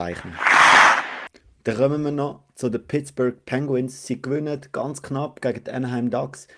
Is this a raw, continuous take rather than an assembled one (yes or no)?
yes